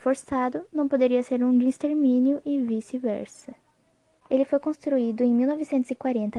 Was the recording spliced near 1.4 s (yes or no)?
no